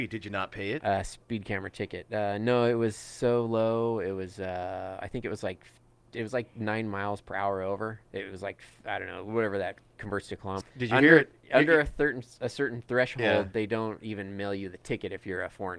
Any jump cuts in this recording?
yes; 1 cut; at 10.6 s

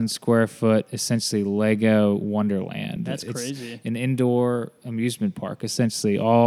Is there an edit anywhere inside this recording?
no; 0 cuts

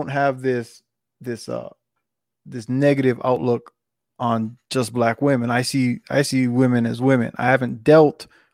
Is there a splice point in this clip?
no; 0 cuts

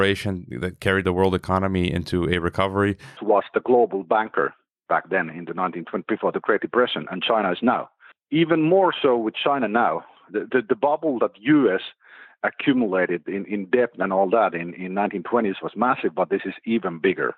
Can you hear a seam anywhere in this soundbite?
yes; 1 cut; at 3.2 s

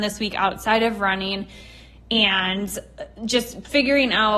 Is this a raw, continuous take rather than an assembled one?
yes; 0 cuts

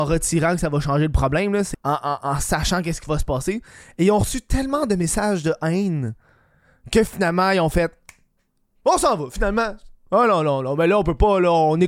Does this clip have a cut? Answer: yes; 1 cut; at 1.7 s

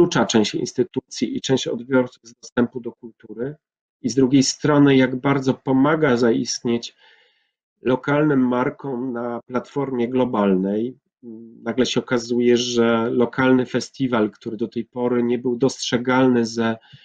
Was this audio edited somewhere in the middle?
no; 0 cuts

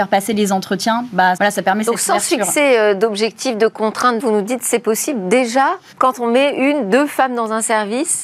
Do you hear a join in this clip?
yes; 3 cuts; at 1.4 s, 4.2 s, 5.9 s

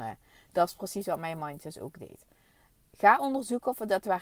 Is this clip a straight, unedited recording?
yes; 0 cuts

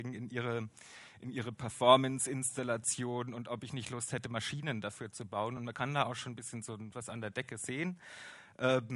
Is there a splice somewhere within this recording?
no; 0 cuts

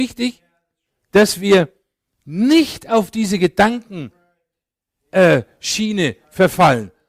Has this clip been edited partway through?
no; 0 cuts

